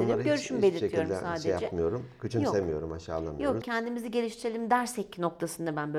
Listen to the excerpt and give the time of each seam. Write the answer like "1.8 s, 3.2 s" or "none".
3.6 s